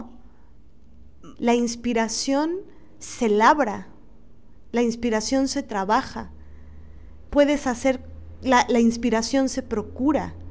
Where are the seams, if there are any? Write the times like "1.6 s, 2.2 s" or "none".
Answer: 1.4 s